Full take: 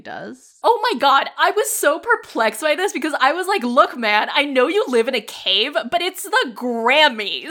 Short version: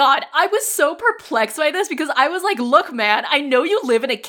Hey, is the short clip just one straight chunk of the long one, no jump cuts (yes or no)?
yes